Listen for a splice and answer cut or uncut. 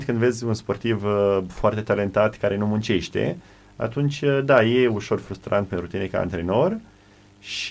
uncut